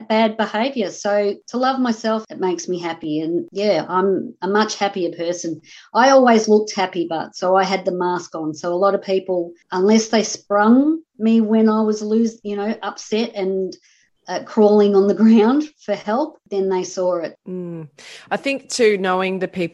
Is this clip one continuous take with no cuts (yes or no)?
no